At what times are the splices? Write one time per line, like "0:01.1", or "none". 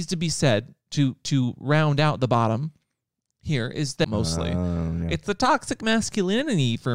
0:04.0